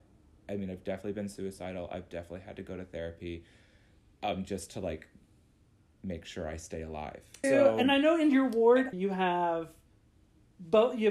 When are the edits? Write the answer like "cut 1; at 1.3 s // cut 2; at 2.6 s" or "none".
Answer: cut 1; at 7.4 s // cut 2; at 8.9 s